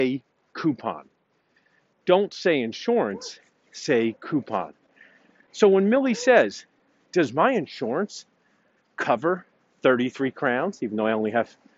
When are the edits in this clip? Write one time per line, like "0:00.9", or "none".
none